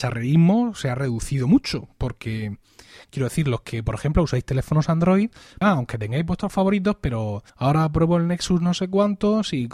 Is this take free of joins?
no; 2 cuts; at 5.6 s, 7.5 s

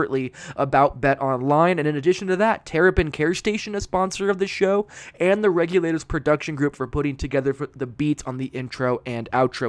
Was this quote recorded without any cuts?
no; 1 cut; at 3.8 s

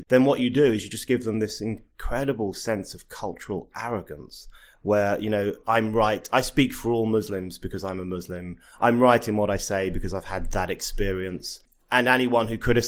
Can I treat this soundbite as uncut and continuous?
yes; 0 cuts

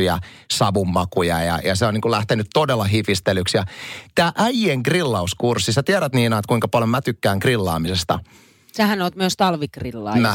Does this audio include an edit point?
no; 0 cuts

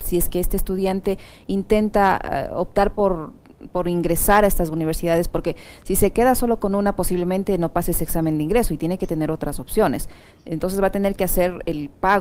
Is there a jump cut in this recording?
no; 0 cuts

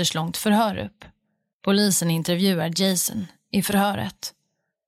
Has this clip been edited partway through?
no; 0 cuts

